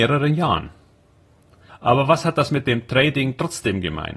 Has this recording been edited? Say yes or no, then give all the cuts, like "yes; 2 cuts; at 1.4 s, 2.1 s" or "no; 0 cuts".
yes; 1 cut; at 1.7 s